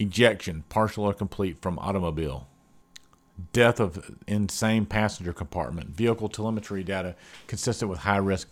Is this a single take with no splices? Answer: yes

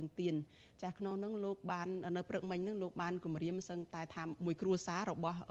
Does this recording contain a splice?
no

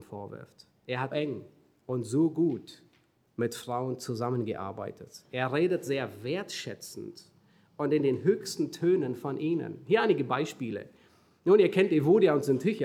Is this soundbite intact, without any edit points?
no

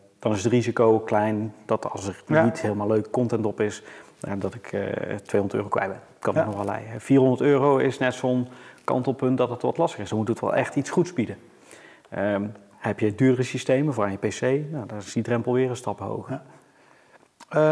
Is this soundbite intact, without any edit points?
yes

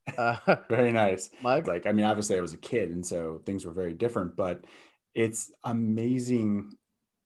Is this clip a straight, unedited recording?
no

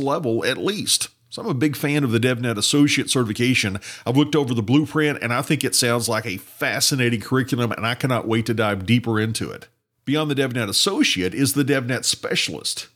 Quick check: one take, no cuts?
yes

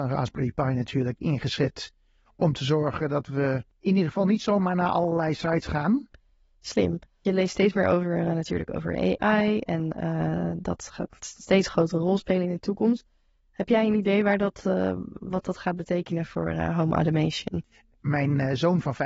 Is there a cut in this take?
no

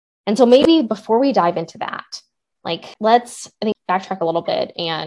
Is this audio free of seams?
yes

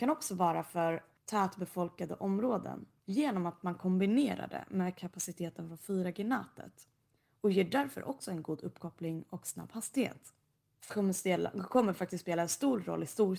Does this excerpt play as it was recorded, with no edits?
yes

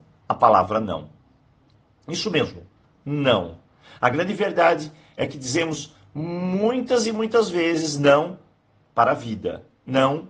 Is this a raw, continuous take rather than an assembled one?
yes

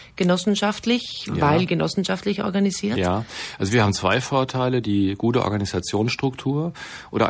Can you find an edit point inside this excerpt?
no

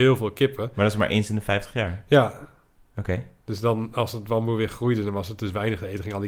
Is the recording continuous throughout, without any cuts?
yes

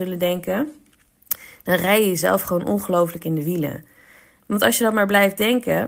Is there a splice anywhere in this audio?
yes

